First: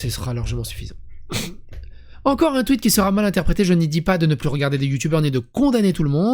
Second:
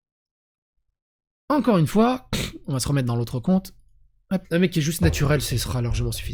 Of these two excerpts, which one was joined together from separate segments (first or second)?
second